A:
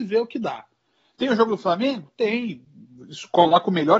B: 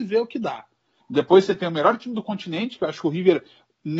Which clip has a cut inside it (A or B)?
B